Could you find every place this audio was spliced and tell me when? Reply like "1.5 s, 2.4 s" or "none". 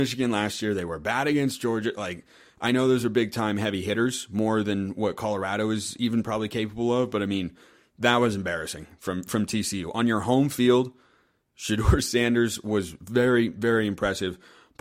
none